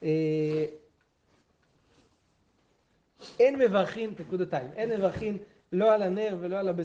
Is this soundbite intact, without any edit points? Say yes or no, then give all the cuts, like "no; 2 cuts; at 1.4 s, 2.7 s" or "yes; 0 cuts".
no; 1 cut; at 4.2 s